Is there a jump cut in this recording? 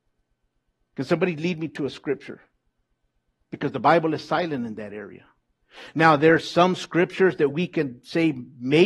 no; 0 cuts

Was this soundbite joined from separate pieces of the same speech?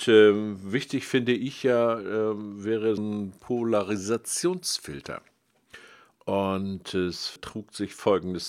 yes; 3 cuts; at 3.0 s, 6.2 s, 7.4 s

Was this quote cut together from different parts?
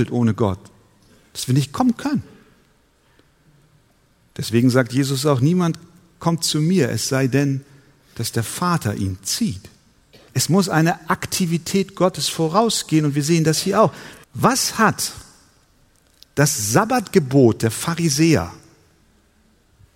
yes; 2 cuts; at 10.3 s, 14.2 s

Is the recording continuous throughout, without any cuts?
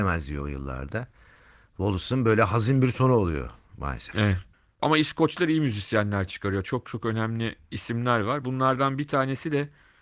yes; 0 cuts

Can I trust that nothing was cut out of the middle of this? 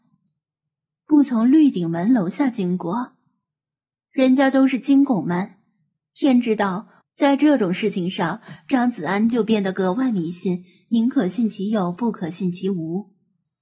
no; 1 cut; at 7.0 s

